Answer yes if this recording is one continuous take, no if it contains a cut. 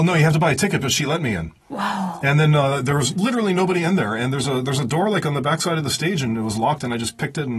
no